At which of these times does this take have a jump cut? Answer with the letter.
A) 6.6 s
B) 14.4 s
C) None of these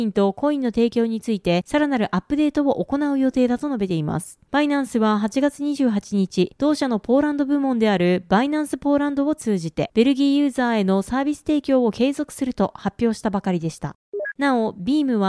B